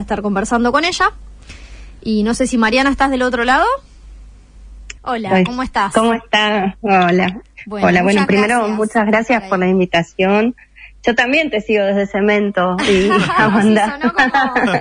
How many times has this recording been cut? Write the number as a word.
one